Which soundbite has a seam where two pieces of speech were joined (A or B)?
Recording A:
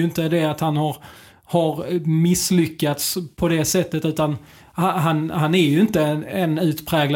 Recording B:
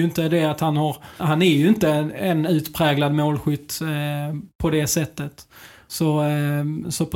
B